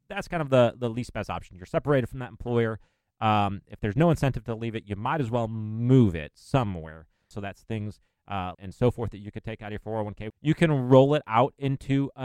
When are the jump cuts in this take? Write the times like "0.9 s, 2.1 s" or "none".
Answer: 7.3 s, 8.5 s, 10.3 s